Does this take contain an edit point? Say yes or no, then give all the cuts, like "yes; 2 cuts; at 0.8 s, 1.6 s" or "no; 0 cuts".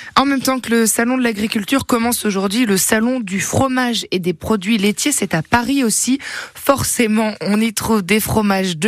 no; 0 cuts